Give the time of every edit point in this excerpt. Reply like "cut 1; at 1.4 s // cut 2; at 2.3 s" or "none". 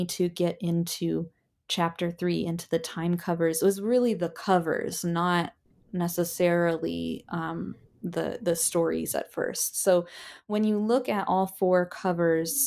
none